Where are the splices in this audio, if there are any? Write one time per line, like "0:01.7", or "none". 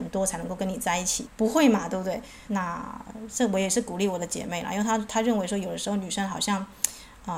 0:01.2
0:02.5